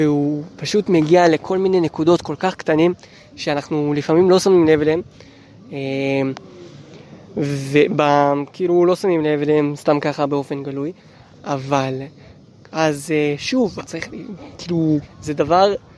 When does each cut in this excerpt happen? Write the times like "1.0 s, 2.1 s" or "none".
12.7 s, 13.8 s, 15.0 s